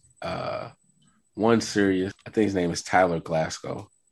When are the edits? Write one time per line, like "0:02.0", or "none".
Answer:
0:02.1